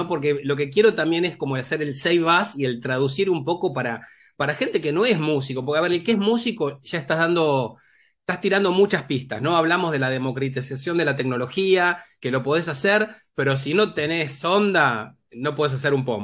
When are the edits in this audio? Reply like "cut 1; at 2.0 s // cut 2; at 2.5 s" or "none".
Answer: none